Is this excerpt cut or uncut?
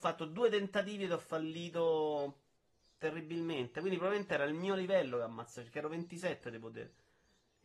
uncut